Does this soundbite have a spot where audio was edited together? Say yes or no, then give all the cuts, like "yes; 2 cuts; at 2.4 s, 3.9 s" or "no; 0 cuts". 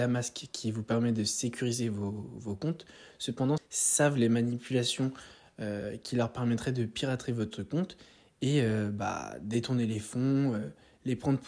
yes; 1 cut; at 3.6 s